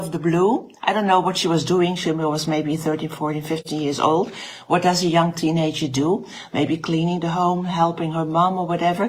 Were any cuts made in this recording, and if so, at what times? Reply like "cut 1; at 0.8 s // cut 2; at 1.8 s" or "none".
none